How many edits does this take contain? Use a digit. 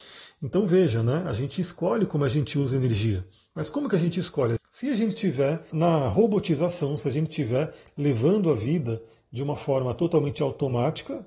2